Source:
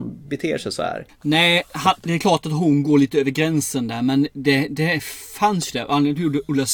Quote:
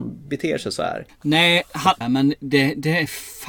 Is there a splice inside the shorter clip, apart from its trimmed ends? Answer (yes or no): yes